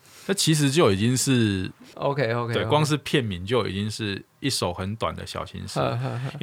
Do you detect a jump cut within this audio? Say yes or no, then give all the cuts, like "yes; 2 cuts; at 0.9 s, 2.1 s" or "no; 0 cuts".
yes; 1 cut; at 1.9 s